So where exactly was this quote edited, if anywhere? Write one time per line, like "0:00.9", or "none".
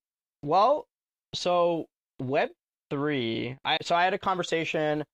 0:03.8